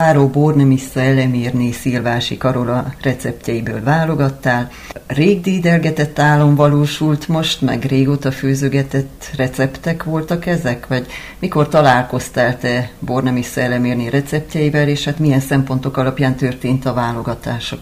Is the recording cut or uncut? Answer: uncut